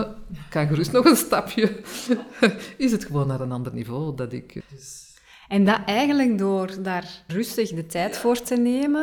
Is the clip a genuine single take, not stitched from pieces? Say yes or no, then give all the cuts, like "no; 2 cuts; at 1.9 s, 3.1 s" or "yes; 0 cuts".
no; 2 cuts; at 4.6 s, 7.3 s